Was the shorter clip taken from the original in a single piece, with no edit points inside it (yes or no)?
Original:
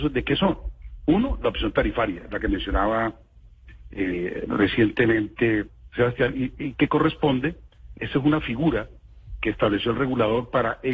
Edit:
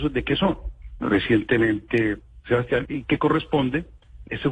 no